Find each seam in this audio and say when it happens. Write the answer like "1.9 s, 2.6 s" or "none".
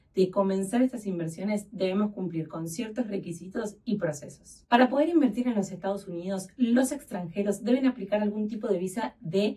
none